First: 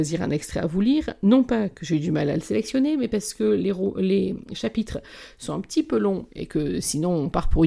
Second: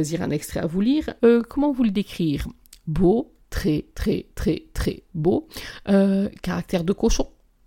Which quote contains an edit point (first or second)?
second